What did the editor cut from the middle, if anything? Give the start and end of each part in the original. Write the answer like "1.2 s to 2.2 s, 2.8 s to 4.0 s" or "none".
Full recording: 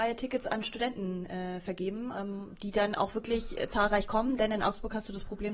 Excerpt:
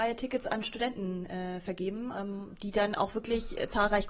none